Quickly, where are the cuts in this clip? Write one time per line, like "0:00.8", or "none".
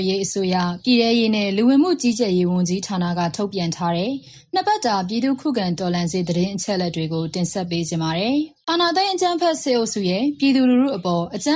0:08.6